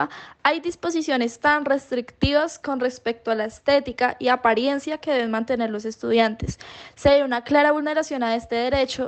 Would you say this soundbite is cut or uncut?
uncut